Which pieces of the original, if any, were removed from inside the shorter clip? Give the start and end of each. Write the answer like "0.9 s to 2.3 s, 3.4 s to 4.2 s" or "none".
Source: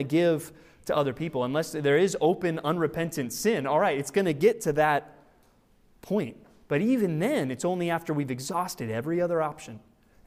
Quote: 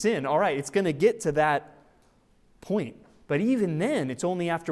none